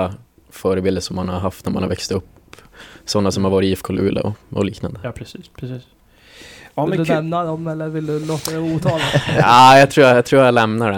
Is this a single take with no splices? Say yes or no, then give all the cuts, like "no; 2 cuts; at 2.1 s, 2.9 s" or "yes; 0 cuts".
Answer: yes; 0 cuts